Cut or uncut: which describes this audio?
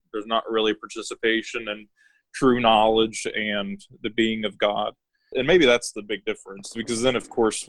cut